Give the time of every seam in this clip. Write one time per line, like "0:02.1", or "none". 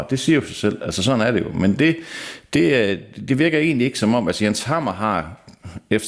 none